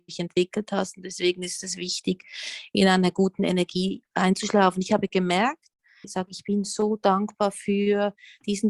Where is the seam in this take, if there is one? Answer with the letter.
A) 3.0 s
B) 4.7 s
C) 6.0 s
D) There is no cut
C